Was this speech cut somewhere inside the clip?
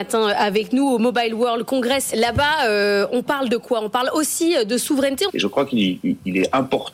yes; 2 cuts; at 2.1 s, 5.3 s

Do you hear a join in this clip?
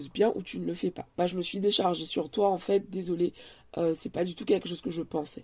yes; 1 cut; at 1.1 s

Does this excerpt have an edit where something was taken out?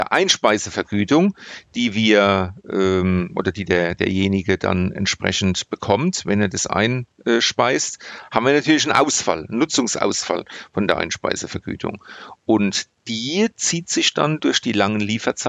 no; 0 cuts

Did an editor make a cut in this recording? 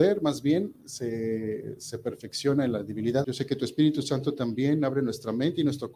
yes; 1 cut; at 3.2 s

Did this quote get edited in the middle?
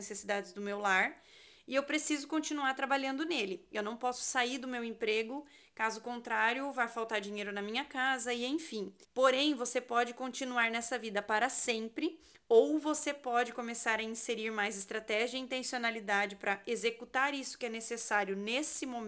yes; 1 cut; at 9.0 s

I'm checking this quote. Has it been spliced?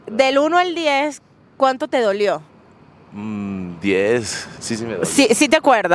no; 0 cuts

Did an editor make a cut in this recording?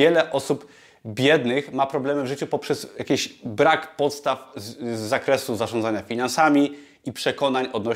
no; 0 cuts

